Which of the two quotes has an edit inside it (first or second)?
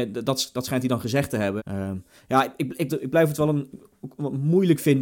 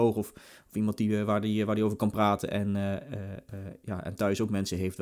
first